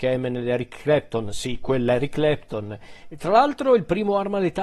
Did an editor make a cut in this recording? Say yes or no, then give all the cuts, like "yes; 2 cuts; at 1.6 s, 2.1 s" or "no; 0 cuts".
yes; 1 cut; at 3.0 s